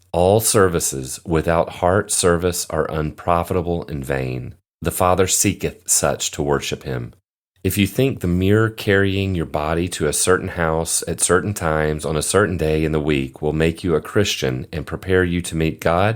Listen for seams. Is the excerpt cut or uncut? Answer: cut